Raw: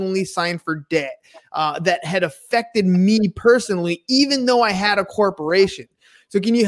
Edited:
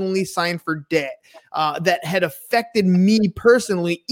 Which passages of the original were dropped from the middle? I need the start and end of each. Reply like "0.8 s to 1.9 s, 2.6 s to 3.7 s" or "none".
none